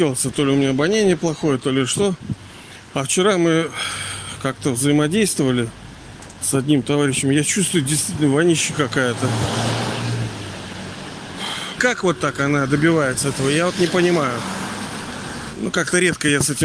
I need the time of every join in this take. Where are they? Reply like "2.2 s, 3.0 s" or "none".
11.8 s, 15.5 s